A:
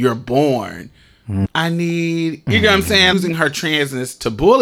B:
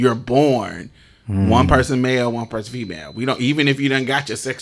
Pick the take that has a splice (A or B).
A